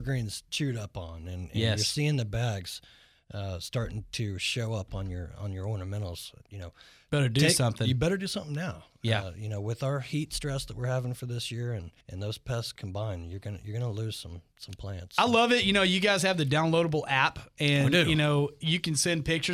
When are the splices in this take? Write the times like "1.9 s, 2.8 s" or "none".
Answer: 12.0 s